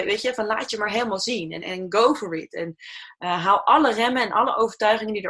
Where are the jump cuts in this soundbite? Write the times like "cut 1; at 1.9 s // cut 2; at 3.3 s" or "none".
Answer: cut 1; at 1.6 s